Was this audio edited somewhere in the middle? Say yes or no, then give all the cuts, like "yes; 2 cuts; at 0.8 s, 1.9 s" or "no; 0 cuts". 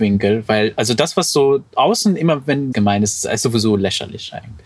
yes; 1 cut; at 2.7 s